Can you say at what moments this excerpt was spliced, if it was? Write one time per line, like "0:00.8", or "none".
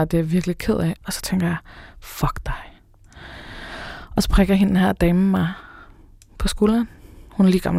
0:01.0